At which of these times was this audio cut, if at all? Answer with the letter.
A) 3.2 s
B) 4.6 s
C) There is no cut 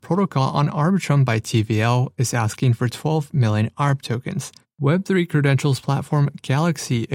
B